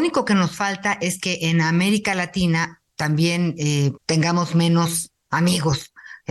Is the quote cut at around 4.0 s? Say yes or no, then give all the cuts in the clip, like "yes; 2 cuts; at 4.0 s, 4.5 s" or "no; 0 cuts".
yes; 1 cut; at 4.0 s